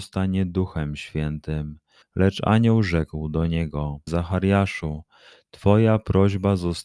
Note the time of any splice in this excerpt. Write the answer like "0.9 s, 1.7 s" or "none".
2.0 s, 4.1 s

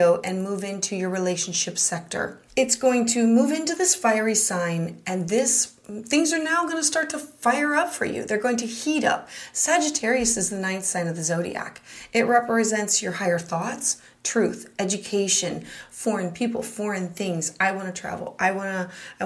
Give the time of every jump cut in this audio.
2.5 s

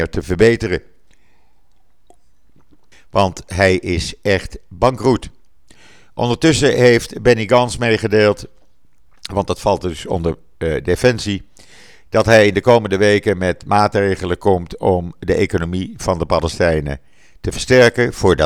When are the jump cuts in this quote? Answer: 2.9 s

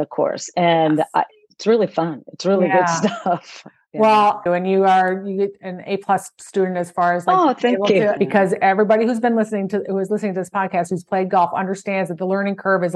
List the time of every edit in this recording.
4.5 s, 8.2 s

